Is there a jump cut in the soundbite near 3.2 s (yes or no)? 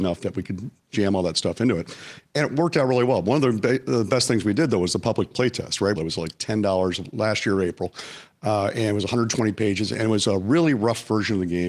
no